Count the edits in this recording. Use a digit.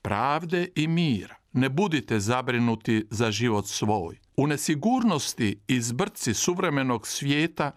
2